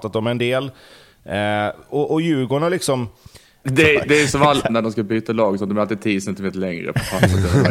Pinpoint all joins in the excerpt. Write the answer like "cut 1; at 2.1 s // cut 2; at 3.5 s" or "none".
cut 1; at 3.6 s // cut 2; at 4.7 s